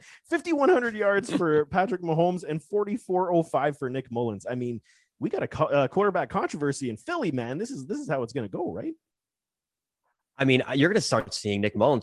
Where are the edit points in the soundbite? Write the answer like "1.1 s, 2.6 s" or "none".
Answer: none